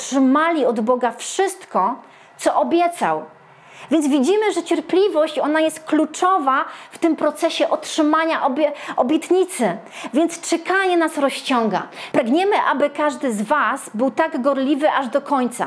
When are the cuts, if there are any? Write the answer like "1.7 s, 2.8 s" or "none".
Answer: 12.1 s